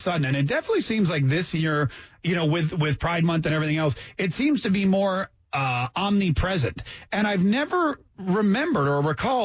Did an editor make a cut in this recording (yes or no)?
no